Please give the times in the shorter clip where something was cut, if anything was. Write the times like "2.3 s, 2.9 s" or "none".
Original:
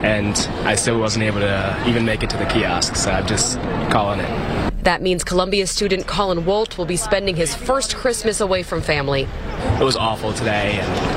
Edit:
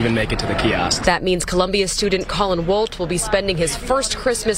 1.0 s